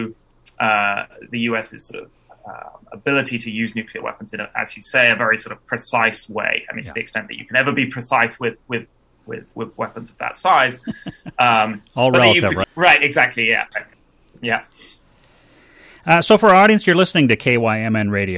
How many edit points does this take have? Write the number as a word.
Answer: two